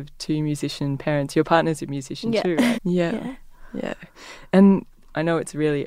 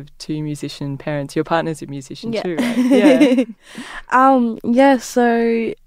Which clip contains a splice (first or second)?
first